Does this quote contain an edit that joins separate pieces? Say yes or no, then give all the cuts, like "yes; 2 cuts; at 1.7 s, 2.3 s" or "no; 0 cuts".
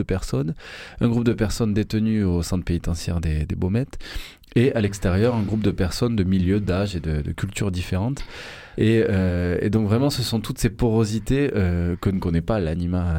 no; 0 cuts